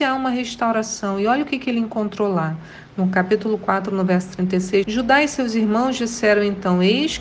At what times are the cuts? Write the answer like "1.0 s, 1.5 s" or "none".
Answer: 4.8 s